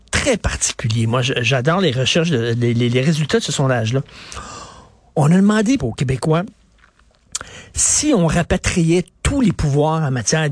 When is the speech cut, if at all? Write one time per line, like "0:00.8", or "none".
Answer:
0:05.8